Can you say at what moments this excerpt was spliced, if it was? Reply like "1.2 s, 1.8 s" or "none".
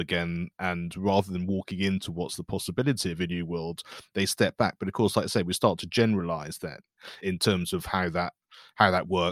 7.2 s